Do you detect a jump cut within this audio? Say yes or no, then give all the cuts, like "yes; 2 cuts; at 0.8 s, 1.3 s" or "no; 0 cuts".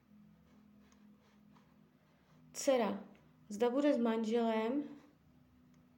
no; 0 cuts